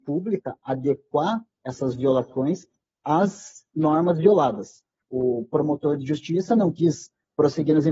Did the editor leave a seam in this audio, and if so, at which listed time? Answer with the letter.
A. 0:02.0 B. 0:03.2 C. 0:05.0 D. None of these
C